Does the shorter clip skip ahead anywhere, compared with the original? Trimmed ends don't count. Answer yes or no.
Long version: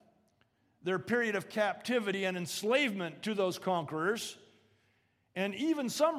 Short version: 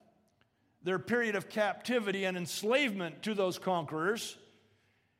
no